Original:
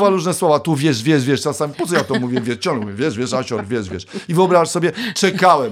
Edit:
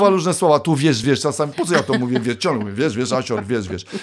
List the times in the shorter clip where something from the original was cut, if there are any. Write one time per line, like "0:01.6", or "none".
0:01.0